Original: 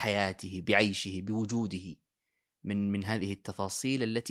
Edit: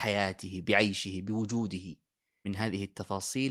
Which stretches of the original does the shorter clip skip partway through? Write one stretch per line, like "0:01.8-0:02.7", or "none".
0:02.4-0:02.9

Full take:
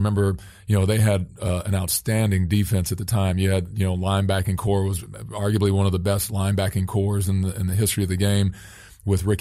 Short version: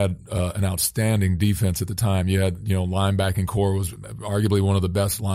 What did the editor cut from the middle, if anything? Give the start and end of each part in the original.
none

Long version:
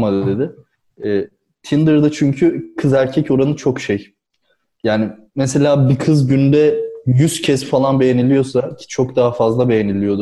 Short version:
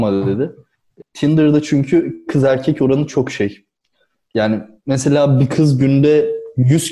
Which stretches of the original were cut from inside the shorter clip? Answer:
0:01.0-0:01.5

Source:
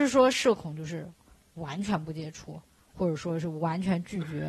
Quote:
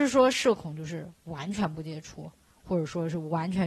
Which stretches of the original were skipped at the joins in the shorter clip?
0:01.2-0:01.5

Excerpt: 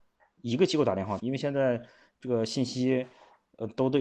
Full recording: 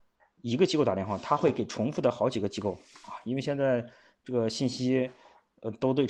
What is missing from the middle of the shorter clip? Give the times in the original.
0:01.2-0:03.2

